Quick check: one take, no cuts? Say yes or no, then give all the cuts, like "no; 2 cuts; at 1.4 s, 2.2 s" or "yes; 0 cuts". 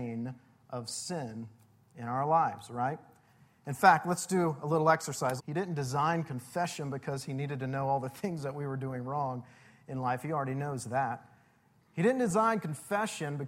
no; 1 cut; at 5.4 s